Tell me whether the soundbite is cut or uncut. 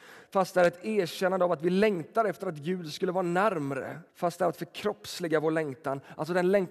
cut